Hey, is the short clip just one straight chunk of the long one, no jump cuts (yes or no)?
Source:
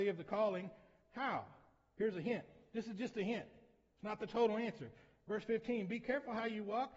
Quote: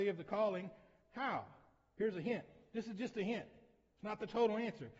yes